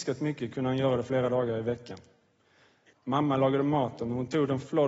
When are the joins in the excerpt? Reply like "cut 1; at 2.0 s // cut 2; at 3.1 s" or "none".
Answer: cut 1; at 2.9 s